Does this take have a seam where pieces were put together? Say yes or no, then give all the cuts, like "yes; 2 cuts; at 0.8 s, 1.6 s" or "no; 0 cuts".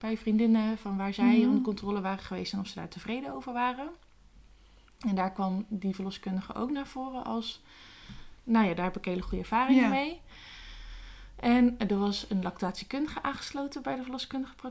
no; 0 cuts